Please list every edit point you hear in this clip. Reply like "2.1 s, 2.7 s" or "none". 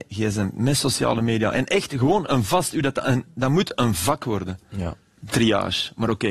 5.2 s